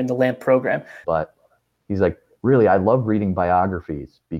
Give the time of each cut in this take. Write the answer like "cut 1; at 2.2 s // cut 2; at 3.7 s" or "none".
cut 1; at 1.0 s